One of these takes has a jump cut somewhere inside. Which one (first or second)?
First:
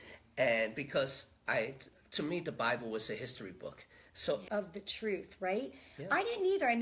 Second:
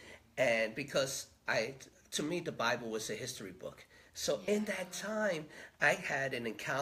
first